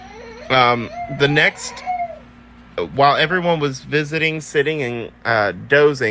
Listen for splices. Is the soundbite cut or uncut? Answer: uncut